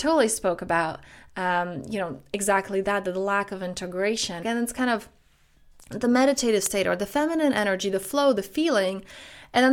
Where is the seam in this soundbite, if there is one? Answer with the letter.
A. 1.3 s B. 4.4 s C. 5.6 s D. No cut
B